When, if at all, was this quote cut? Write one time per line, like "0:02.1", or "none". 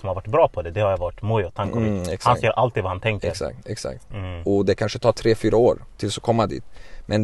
0:04.1